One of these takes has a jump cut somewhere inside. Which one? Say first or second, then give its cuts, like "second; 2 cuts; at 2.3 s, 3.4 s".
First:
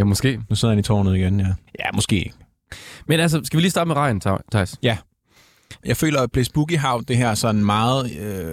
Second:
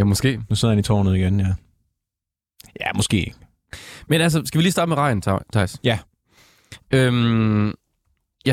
first; 2 cuts; at 1.7 s, 5.8 s